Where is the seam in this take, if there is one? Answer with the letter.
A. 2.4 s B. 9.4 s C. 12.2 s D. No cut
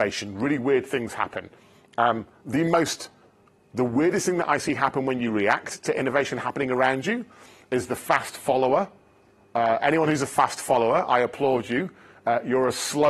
D